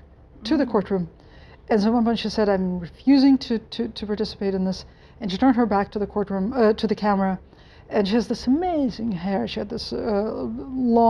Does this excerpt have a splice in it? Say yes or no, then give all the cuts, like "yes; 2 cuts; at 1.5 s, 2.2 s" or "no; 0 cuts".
no; 0 cuts